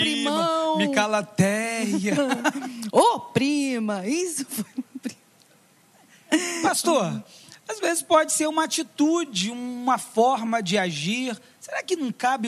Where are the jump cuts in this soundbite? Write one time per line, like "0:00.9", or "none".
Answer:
none